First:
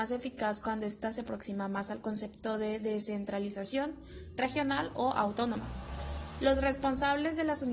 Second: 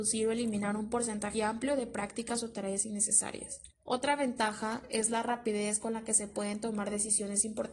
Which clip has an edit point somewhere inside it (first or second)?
second